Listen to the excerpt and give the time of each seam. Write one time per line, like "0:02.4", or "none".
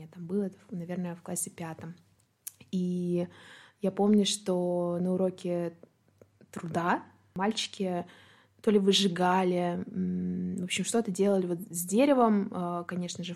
none